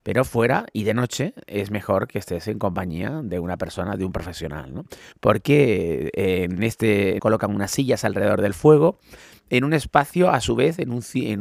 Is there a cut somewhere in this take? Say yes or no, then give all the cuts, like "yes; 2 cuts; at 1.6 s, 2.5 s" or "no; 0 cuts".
yes; 2 cuts; at 5.1 s, 7.2 s